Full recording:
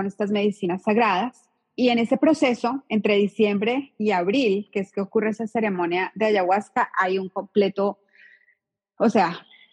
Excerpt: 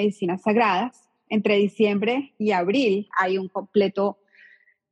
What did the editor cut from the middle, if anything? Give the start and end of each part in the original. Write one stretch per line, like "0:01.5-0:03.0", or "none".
0:01.7-0:02.9
0:04.7-0:06.9

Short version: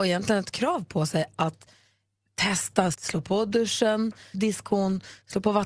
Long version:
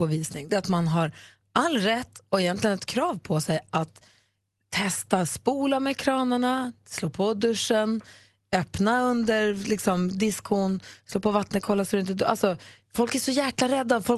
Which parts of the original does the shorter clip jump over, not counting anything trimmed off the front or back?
0:05.3-0:06.8
0:08.2-0:10.1

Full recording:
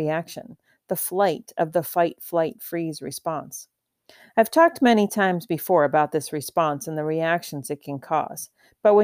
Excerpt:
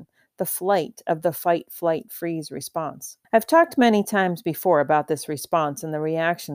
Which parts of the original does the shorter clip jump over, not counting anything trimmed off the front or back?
0:03.8-0:04.3

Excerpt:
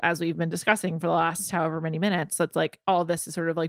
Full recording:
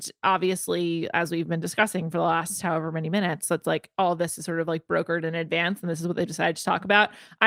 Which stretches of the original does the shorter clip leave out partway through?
none

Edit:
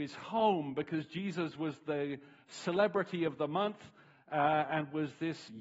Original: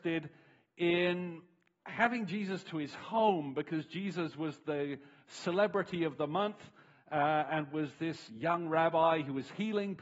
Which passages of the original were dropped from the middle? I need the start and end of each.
none

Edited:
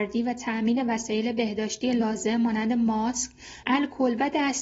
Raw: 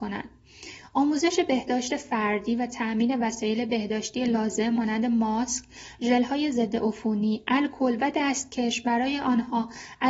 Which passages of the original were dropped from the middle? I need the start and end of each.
0:06.0-0:07.4

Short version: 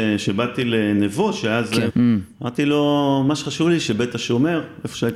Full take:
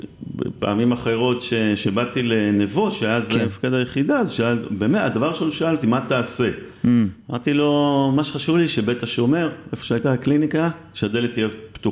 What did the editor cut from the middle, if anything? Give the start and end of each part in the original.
0:03.5-0:06.8

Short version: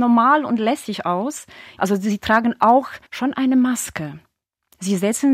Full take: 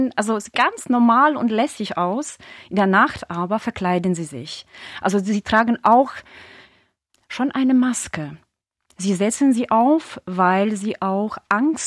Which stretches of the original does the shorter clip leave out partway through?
0:02.7-0:05.0
0:06.3-0:07.2

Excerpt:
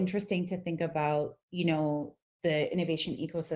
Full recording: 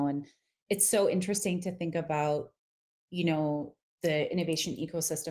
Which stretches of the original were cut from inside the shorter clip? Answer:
0:02.5-0:03.0

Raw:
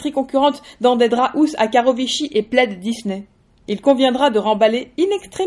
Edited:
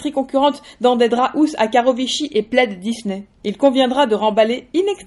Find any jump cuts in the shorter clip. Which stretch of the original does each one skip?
0:03.3-0:03.6

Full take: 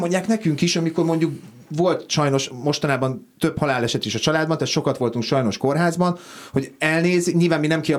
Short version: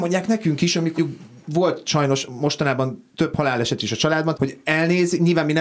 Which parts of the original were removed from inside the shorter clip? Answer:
0:01.0-0:01.2
0:04.6-0:06.5

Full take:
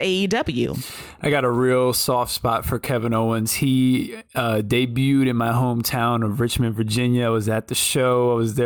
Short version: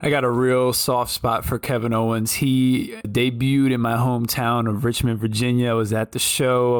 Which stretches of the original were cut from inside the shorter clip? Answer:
0:04.2-0:04.6

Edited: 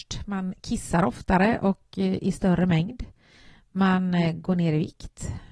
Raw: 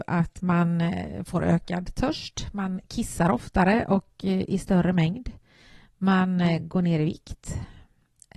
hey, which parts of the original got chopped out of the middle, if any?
none

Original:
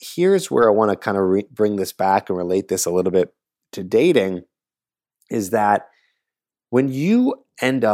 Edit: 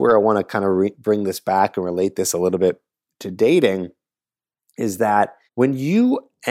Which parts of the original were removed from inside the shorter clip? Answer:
0:06.0-0:06.6

